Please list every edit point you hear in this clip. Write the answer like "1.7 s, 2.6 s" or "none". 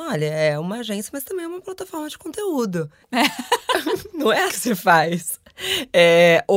3.0 s, 4.5 s